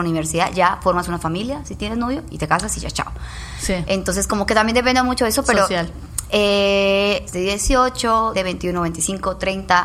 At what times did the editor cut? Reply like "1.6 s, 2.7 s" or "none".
7.3 s, 8.3 s